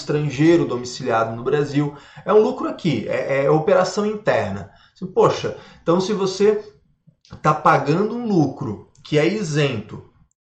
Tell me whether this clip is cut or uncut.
uncut